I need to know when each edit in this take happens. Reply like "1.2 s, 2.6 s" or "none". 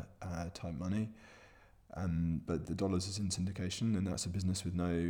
2.6 s